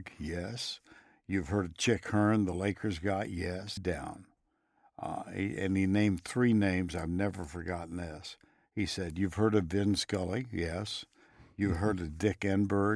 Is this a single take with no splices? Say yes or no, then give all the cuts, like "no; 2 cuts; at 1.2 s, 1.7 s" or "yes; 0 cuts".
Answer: no; 1 cut; at 3.8 s